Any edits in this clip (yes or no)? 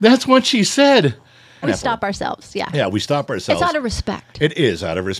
yes